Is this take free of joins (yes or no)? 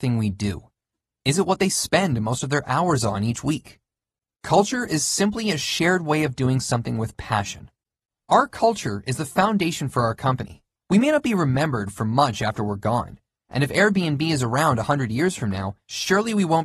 no